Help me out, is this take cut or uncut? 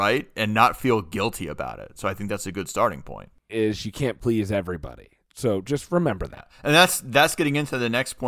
cut